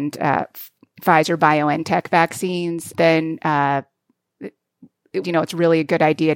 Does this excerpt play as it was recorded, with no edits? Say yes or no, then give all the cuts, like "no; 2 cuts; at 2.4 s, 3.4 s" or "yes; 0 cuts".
no; 2 cuts; at 2.9 s, 5.2 s